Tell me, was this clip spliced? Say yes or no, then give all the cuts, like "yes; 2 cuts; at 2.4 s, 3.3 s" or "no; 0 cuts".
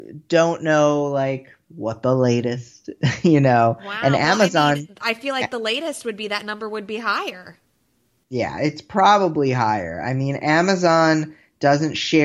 no; 0 cuts